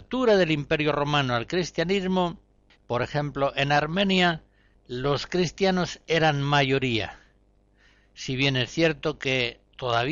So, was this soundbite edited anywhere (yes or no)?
yes